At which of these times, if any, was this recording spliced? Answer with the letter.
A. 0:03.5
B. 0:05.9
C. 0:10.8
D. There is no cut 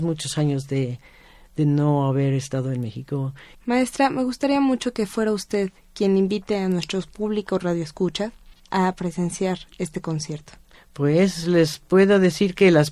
A